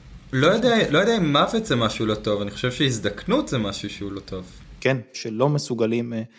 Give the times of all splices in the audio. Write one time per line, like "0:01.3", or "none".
0:05.1